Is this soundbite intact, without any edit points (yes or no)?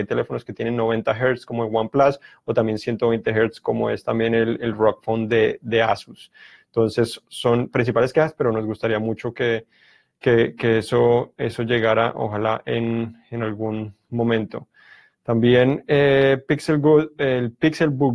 yes